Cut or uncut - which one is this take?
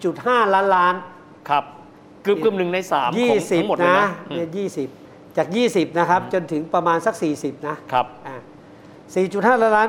uncut